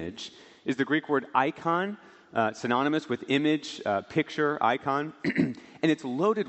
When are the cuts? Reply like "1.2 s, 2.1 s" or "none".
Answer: none